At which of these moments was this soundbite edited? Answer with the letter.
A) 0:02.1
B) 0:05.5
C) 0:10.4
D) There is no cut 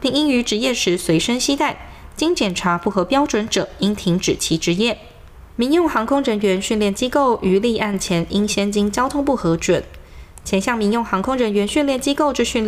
B